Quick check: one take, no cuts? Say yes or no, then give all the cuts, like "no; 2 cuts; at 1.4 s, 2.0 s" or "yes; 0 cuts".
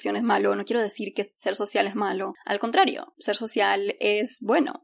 yes; 0 cuts